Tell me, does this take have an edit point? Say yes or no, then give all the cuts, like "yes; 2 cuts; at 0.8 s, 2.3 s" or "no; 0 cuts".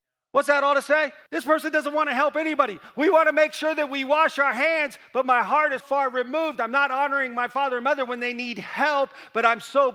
yes; 2 cuts; at 1.3 s, 5.8 s